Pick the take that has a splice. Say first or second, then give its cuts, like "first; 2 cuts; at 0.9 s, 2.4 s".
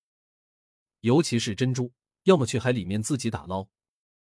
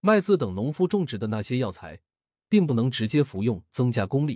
first; 1 cut; at 2.1 s